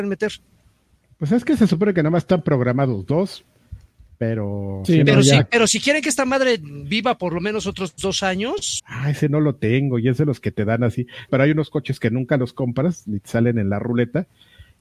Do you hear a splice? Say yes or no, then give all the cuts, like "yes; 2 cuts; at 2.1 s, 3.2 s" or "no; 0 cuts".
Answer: yes; 2 cuts; at 8.8 s, 11.3 s